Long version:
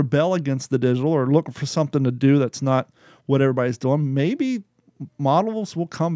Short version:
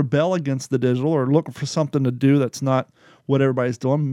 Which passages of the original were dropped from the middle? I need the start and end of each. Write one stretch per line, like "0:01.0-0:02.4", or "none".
none